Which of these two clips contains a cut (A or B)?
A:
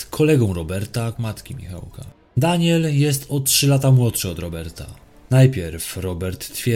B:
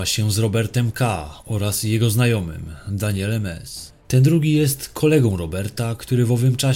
A